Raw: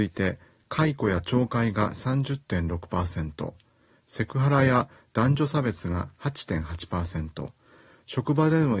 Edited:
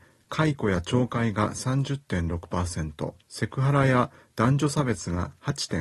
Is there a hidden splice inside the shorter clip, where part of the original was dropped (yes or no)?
yes